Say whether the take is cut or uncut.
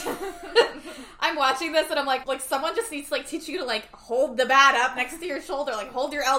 cut